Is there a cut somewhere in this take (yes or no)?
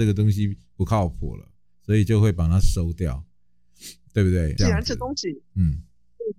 yes